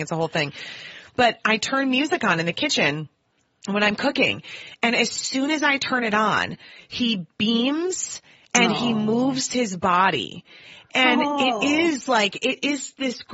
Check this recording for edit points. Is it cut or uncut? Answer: uncut